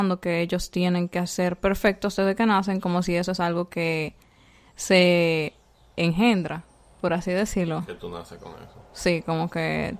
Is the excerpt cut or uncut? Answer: uncut